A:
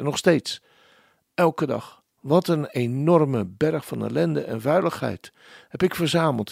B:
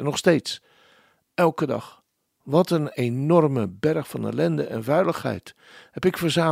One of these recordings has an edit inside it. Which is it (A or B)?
A